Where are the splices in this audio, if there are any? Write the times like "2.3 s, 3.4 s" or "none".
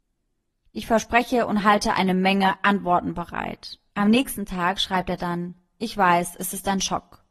3.9 s